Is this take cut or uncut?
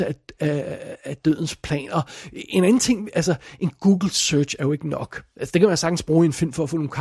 uncut